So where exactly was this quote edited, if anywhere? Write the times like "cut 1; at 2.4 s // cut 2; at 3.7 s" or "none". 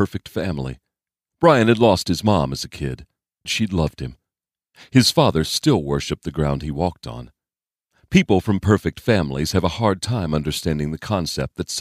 cut 1; at 3.5 s